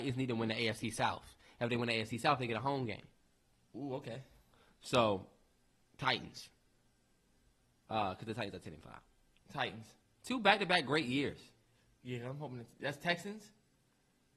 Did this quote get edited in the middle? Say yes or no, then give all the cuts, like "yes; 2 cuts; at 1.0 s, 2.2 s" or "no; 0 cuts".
yes; 1 cut; at 10.0 s